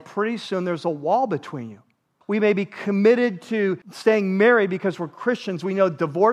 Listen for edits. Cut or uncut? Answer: cut